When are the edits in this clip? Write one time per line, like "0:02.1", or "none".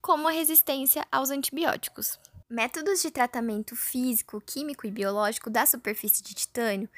0:02.4